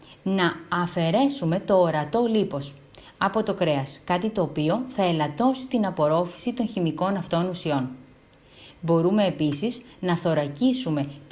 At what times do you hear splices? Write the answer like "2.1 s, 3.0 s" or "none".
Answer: none